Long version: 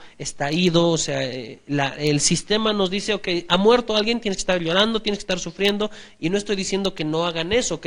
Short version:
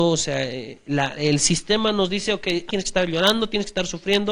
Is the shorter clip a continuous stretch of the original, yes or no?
no